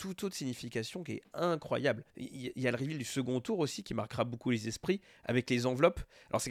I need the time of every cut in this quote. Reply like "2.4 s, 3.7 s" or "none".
2.1 s